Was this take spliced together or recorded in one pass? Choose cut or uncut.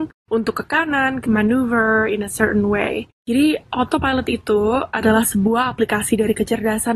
cut